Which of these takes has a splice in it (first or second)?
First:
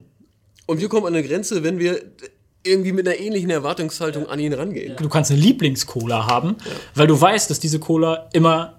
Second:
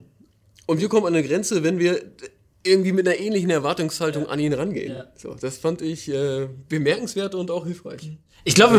first